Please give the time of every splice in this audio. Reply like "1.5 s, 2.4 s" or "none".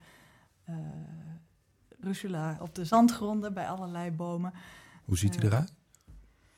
2.6 s